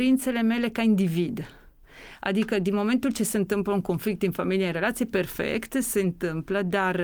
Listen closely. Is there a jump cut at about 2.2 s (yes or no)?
no